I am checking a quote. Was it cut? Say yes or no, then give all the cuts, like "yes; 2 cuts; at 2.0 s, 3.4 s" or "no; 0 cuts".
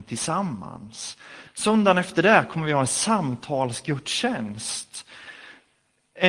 yes; 1 cut; at 1.5 s